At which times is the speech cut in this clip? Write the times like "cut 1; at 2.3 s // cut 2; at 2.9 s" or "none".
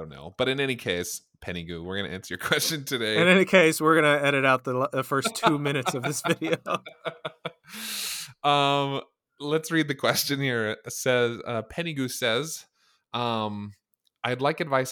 none